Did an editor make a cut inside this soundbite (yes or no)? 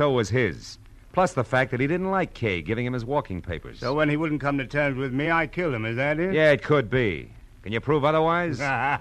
no